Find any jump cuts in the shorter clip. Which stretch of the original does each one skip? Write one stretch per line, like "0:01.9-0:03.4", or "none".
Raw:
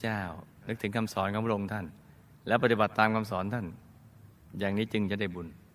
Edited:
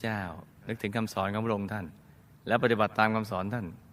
none